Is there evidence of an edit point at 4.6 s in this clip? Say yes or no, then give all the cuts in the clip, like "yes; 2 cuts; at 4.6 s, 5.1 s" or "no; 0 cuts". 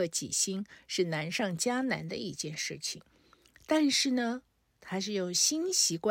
yes; 1 cut; at 4.6 s